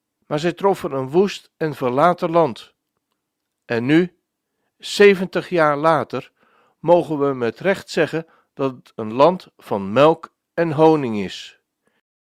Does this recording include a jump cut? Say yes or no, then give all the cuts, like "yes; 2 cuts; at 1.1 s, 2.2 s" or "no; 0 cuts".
no; 0 cuts